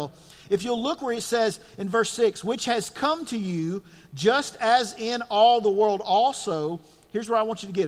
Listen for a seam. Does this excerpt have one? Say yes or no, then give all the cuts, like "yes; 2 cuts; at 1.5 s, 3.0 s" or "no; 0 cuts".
no; 0 cuts